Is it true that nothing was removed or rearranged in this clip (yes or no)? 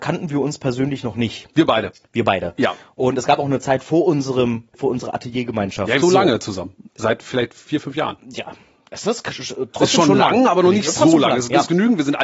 no